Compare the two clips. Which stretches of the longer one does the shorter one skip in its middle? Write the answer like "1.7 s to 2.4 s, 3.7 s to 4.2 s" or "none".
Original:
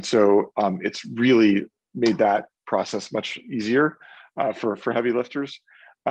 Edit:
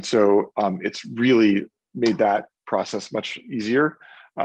none

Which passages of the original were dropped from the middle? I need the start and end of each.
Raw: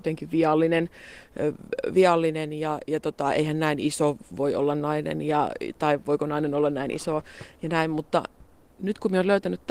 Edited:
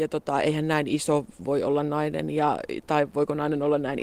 none

